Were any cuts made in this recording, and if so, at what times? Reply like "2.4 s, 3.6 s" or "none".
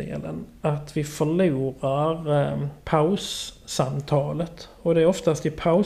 none